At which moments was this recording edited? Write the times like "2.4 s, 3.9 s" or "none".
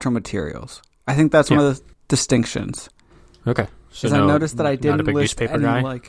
none